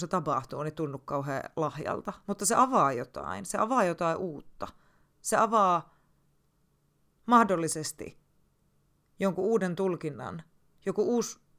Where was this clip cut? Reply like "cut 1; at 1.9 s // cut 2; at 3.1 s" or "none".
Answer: cut 1; at 2.2 s